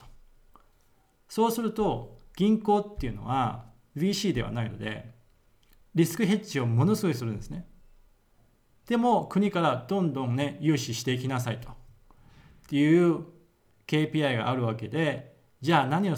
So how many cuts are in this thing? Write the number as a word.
zero